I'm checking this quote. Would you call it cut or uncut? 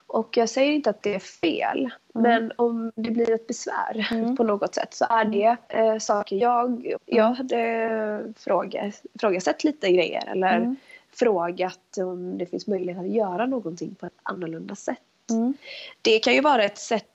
cut